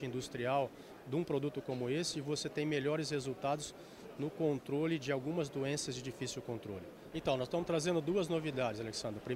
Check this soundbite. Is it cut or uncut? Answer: cut